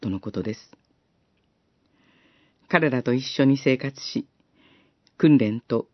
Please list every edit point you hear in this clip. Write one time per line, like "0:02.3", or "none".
0:02.5